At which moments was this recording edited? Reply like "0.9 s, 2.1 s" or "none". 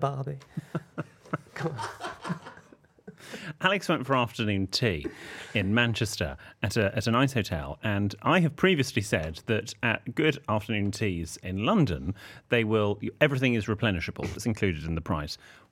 11.4 s, 14.4 s